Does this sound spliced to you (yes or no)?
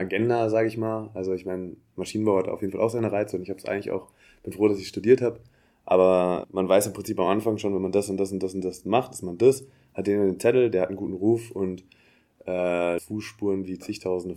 yes